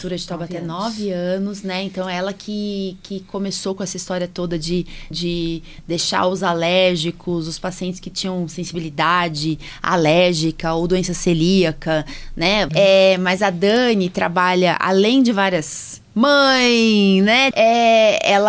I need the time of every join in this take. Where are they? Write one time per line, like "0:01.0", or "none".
0:05.1
0:12.7
0:17.5